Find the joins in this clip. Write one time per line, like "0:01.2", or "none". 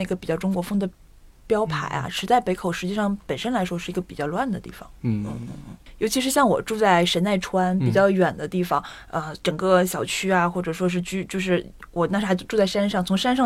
0:01.4